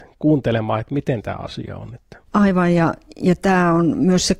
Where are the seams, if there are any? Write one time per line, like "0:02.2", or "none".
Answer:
0:02.2